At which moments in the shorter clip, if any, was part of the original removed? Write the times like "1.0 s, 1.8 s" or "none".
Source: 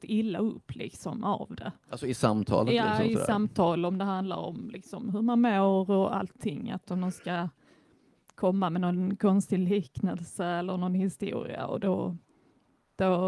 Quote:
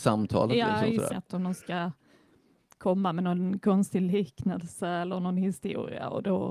1.1 s